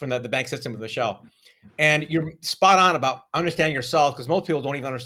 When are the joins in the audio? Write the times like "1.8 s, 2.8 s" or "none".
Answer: none

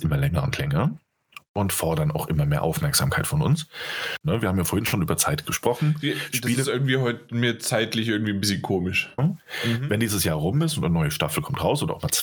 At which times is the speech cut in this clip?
4.2 s, 9.2 s

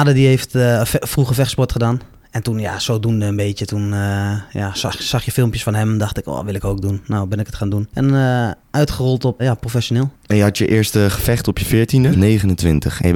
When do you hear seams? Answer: 9.4 s, 12.1 s

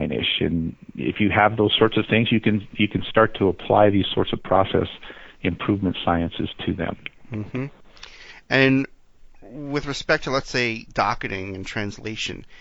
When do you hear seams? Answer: none

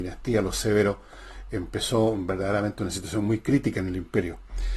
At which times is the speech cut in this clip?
none

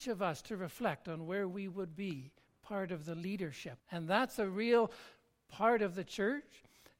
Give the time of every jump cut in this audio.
3.8 s

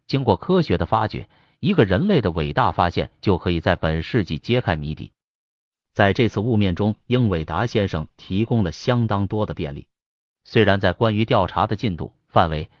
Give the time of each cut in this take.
5.8 s, 7.0 s

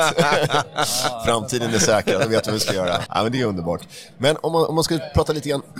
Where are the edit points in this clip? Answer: 3.1 s

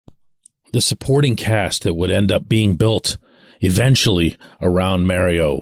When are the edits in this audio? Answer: none

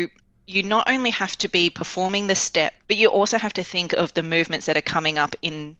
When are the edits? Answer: 2.8 s

